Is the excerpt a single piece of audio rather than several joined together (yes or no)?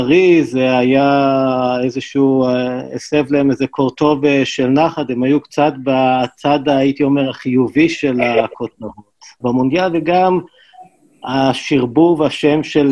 no